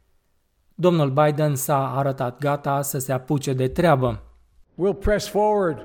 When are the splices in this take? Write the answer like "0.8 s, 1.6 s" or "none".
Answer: none